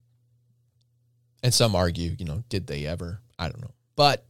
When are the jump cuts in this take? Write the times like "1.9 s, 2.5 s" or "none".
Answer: none

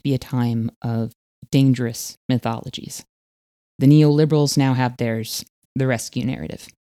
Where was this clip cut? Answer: 5.7 s

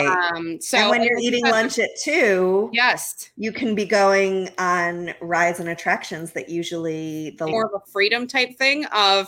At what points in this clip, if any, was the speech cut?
7.5 s

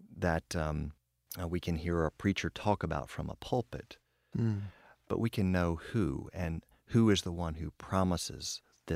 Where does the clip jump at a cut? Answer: 4.3 s

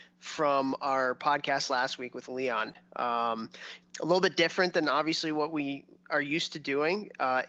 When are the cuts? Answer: 3.8 s

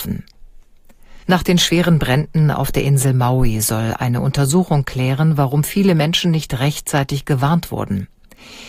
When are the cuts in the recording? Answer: 1.2 s

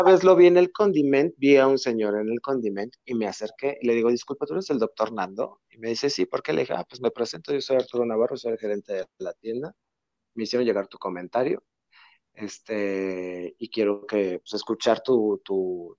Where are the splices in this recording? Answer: 14.5 s

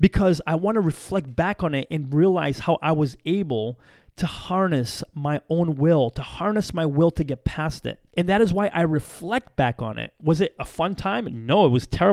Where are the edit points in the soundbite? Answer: 8.1 s

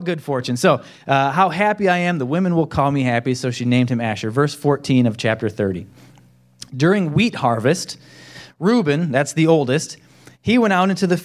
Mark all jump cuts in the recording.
none

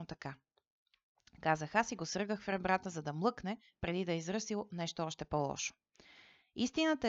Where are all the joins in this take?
none

